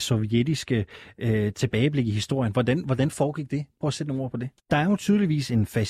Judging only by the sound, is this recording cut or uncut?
cut